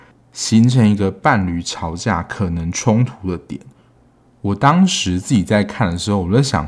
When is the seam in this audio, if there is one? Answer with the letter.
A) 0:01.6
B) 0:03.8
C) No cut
C